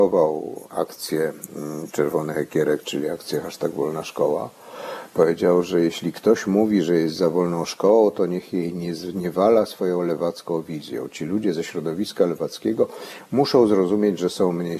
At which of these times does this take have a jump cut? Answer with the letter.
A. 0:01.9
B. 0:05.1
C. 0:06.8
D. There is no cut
A